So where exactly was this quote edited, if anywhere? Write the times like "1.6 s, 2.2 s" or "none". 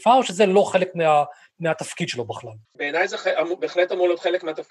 2.6 s